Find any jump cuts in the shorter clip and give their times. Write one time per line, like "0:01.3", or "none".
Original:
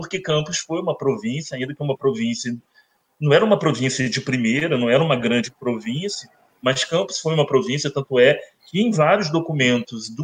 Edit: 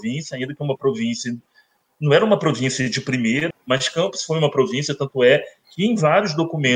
0:03.5

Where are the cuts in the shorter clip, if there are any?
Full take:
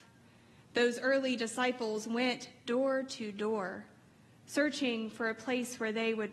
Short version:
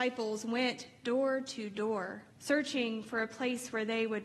0:02.3

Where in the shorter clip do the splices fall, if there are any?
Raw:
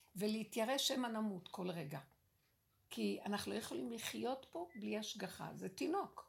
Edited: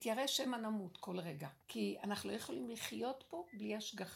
0:01.6

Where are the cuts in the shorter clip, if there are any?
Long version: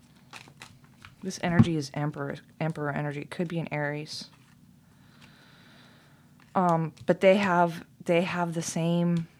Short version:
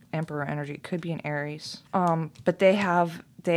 0:01.9

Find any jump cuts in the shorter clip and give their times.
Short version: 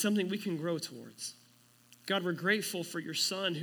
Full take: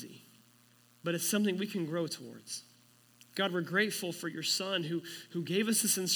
none

